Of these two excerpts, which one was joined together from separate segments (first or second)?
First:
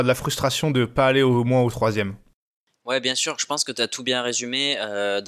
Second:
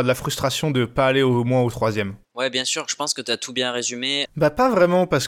second